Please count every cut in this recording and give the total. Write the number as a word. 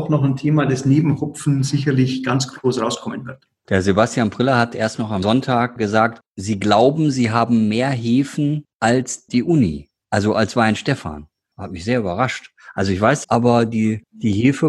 one